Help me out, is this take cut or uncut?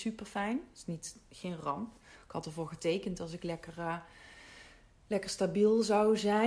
uncut